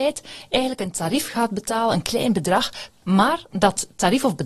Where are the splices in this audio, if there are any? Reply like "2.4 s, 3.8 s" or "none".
3.0 s